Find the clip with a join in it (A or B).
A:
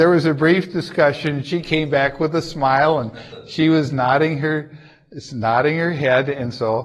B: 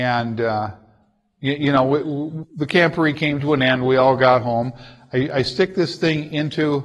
B